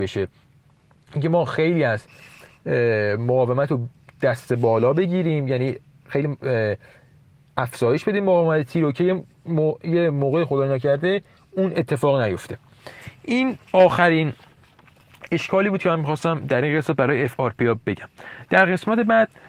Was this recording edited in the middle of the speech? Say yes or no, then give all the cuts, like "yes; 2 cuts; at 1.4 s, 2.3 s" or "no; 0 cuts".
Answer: yes; 1 cut; at 13.7 s